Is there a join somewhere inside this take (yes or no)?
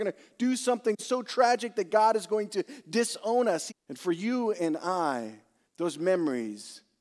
yes